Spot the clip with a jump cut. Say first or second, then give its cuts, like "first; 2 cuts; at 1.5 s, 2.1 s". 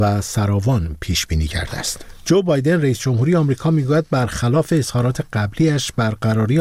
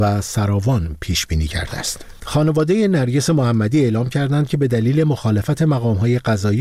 second; 1 cut; at 2.2 s